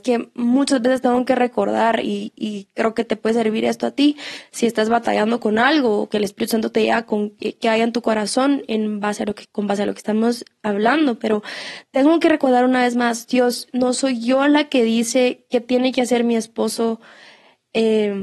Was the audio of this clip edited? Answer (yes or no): no